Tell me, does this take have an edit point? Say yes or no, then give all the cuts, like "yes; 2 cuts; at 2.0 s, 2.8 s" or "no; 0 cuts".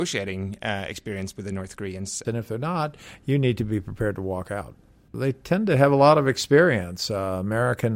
yes; 2 cuts; at 2.2 s, 5.1 s